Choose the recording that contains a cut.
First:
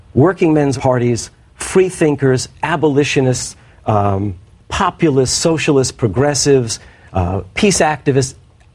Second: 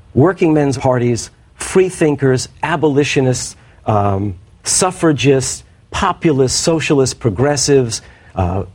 first; 1 cut; at 4.6 s

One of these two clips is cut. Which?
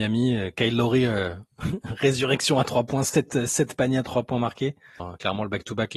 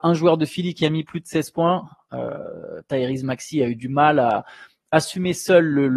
first; 1 cut; at 5.0 s

